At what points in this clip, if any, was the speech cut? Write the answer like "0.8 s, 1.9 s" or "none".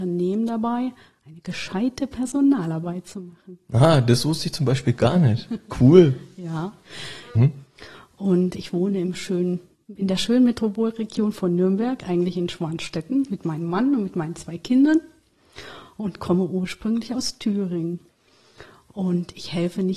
7.3 s, 9.7 s